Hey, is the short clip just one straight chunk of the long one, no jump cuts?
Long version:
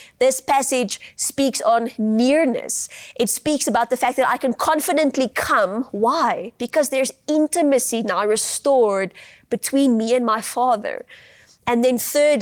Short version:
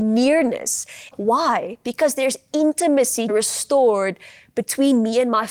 no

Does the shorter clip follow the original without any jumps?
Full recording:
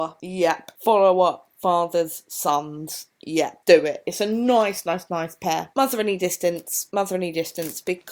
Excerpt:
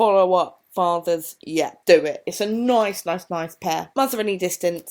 no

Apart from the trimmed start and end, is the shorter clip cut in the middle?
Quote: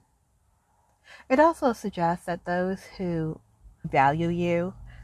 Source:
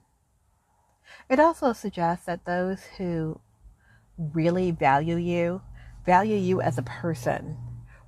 yes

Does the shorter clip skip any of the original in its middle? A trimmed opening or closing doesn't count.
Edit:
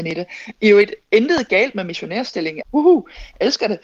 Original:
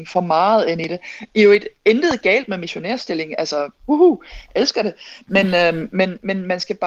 yes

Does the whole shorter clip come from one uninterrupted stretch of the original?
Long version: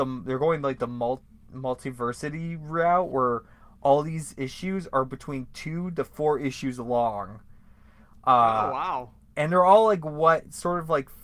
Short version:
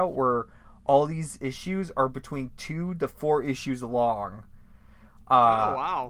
yes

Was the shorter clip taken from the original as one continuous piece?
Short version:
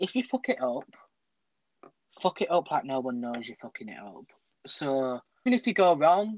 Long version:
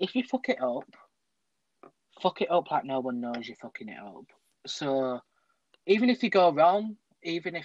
no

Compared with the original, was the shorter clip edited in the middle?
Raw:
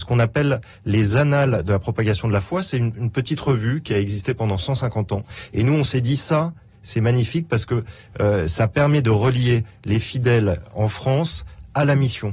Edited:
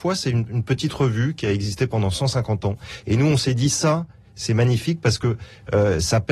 no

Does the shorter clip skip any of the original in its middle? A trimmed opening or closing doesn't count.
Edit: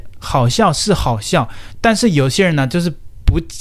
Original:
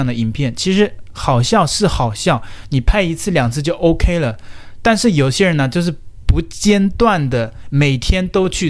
yes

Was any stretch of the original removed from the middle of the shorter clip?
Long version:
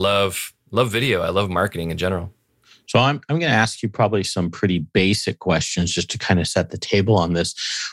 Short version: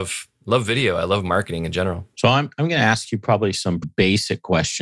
yes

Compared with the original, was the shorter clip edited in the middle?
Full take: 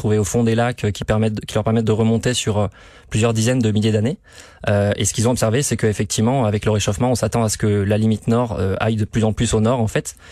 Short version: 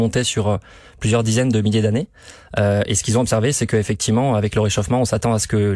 no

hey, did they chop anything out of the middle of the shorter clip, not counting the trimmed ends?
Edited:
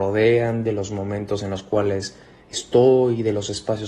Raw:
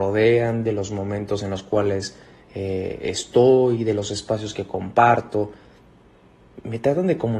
yes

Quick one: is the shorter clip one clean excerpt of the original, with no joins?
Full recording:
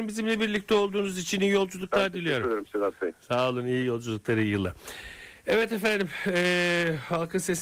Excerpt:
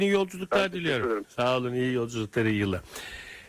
no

